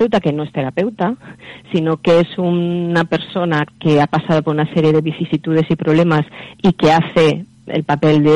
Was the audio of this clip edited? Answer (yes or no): no